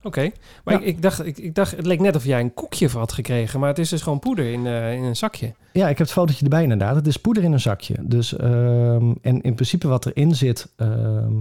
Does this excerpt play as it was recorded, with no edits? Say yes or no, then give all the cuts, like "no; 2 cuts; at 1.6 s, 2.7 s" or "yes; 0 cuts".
yes; 0 cuts